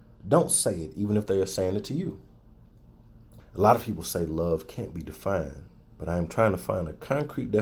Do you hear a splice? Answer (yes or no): yes